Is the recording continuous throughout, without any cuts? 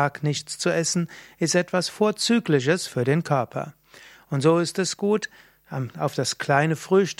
yes; 0 cuts

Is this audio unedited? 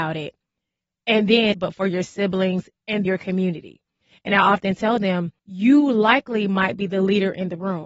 no; 3 cuts; at 1.5 s, 3.1 s, 5.4 s

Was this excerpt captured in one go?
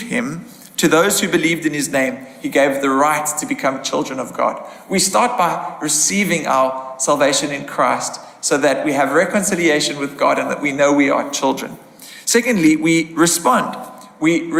yes; 0 cuts

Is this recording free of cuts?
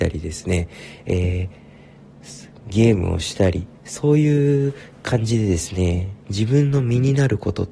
no; 1 cut; at 3.8 s

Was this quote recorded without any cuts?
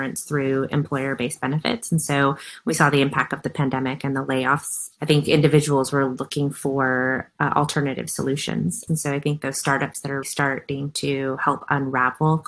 no; 2 cuts; at 8.9 s, 10.2 s

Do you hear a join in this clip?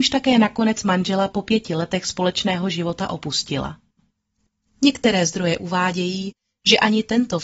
no; 0 cuts

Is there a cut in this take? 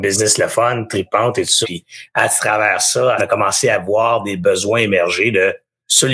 yes; 2 cuts; at 1.6 s, 3.2 s

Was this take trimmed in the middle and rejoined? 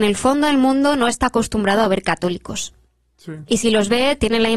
no; 0 cuts

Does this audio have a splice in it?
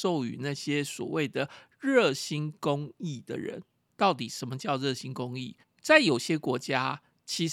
yes; 2 cuts; at 3.9 s, 5.6 s

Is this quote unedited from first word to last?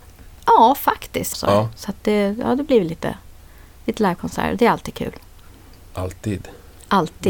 no; 1 cut; at 1.3 s

